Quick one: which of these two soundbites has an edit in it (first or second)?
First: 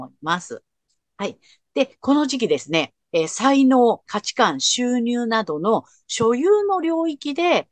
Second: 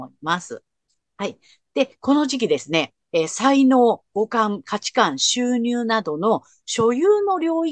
first